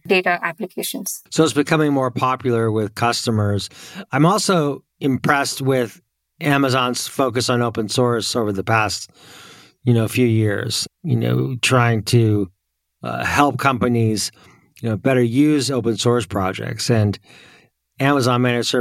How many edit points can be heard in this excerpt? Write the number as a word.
one